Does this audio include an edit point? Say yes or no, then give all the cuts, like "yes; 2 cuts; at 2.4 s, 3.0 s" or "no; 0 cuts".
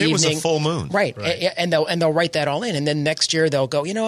no; 0 cuts